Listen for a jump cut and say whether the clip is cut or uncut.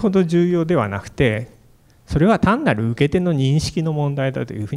uncut